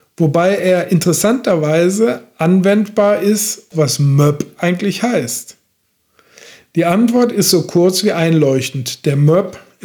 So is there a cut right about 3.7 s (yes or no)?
yes